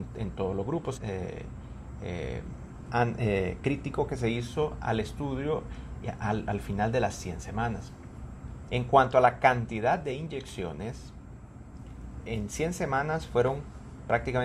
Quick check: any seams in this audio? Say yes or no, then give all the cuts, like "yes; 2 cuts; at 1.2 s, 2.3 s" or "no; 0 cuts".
yes; 3 cuts; at 1.0 s, 8.7 s, 12.2 s